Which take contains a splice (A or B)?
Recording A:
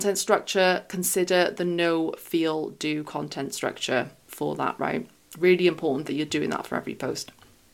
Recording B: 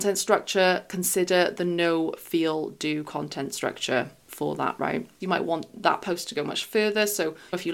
B